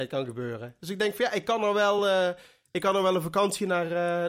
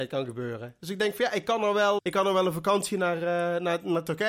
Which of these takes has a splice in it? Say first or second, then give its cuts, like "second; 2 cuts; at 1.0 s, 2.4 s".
second; 1 cut; at 2.0 s